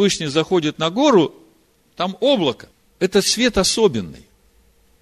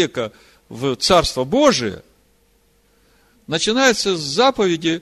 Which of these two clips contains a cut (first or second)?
first